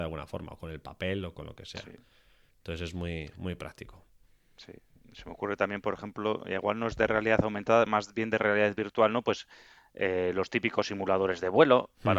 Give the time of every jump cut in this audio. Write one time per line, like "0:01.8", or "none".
none

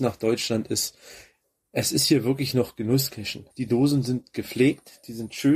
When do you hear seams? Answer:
0:03.5

